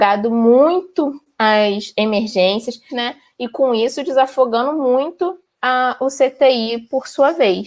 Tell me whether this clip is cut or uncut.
cut